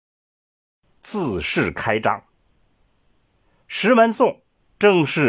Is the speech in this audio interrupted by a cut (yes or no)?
yes